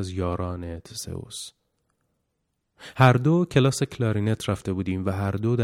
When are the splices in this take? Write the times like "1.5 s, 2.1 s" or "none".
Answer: 2.9 s